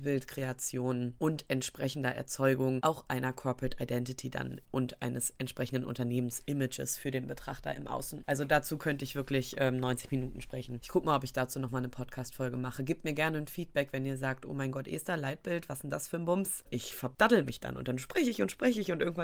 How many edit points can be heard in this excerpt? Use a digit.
1